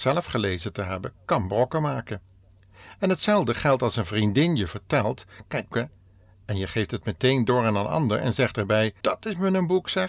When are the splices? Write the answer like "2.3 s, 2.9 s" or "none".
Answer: 5.7 s, 9.0 s